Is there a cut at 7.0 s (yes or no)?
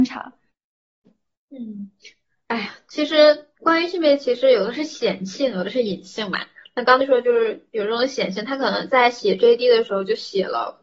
yes